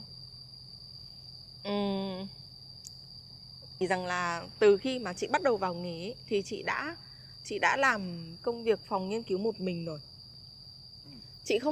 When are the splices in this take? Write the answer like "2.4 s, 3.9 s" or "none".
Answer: 3.8 s